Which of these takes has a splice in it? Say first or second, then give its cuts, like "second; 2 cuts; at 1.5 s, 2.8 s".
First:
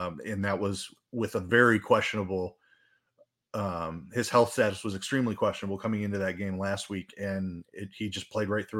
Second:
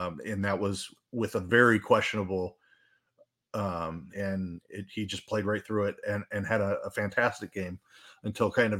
second; 1 cut; at 4.1 s